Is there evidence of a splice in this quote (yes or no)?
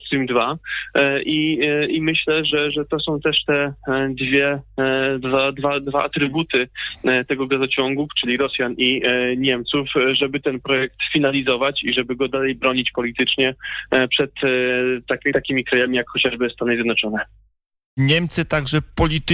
yes